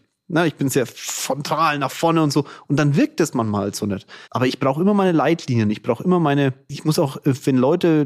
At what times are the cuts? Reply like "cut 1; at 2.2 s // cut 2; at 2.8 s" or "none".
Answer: cut 1; at 4.2 s